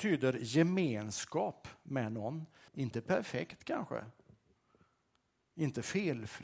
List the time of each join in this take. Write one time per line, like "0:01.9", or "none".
0:02.7